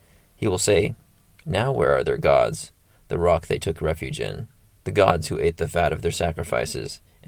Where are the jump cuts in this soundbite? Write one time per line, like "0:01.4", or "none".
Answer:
none